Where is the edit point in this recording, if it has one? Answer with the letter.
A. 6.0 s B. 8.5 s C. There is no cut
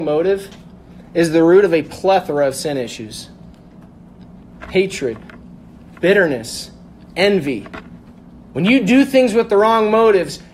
A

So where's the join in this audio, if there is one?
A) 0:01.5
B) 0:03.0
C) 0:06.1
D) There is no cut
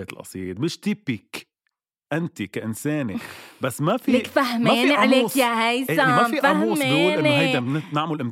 D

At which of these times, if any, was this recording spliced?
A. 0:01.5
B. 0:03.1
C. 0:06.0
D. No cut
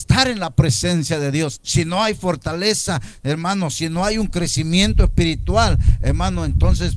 A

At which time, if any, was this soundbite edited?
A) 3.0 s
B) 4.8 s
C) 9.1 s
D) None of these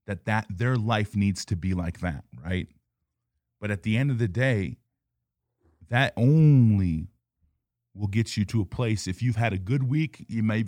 D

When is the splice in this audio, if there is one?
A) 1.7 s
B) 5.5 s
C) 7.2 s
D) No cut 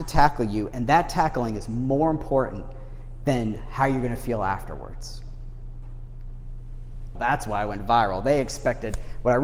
C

